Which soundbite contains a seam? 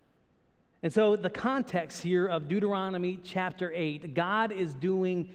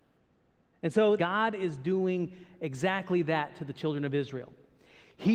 second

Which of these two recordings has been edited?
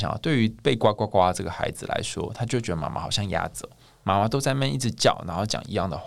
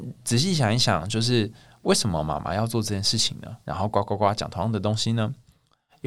second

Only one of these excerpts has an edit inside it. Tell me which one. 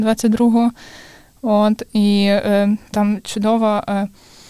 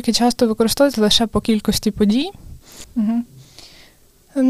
second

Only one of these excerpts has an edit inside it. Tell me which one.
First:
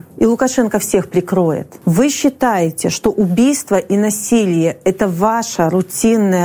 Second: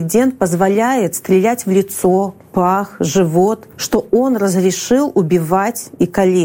second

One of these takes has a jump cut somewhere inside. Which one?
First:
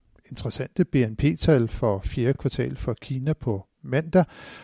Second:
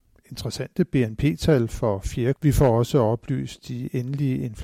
second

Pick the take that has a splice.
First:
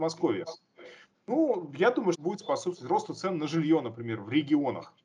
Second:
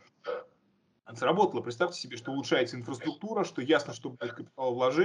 first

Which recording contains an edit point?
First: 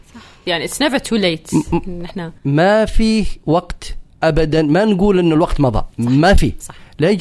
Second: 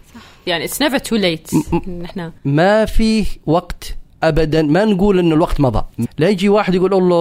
second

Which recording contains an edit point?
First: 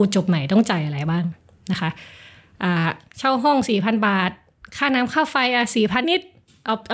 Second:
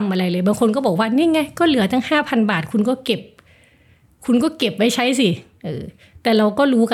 first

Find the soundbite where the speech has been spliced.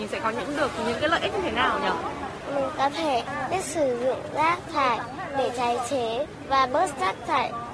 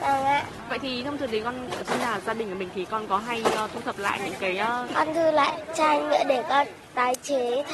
second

